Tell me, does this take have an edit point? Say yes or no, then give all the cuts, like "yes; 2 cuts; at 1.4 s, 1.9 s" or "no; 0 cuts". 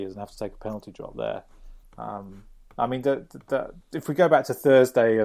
yes; 2 cuts; at 1.8 s, 3.8 s